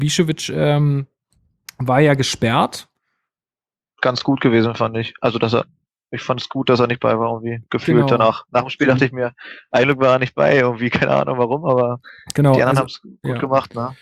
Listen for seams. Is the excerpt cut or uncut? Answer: uncut